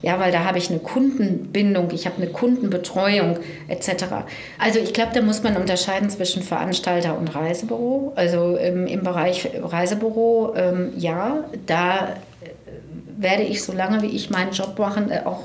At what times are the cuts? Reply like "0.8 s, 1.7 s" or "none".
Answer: 4.6 s